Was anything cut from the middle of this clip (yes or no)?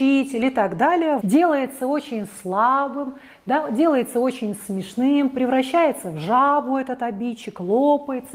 yes